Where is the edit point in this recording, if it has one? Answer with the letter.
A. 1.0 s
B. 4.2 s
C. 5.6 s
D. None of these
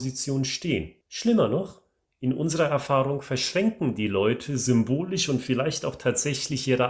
A